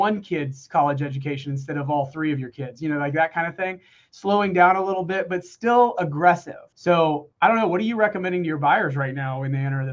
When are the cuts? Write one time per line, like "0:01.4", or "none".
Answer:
none